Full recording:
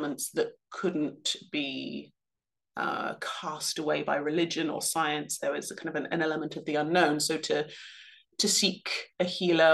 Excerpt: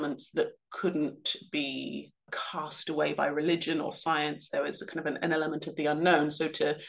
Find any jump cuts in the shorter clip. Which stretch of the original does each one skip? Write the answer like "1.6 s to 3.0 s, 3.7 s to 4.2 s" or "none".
2.3 s to 3.2 s